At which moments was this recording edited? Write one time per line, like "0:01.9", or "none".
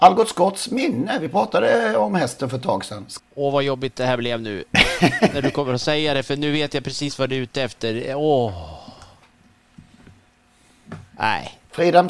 0:03.2